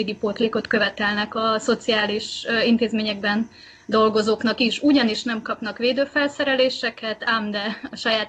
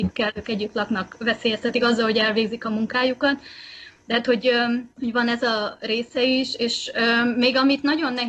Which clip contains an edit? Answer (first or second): second